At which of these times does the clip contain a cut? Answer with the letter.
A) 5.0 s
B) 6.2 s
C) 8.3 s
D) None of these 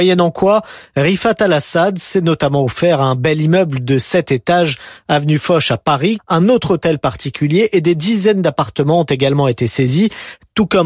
B